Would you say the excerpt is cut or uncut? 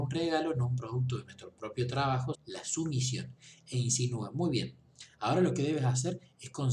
cut